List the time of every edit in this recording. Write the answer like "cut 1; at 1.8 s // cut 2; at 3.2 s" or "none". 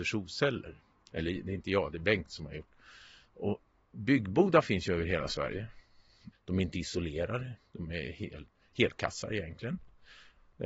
cut 1; at 6.3 s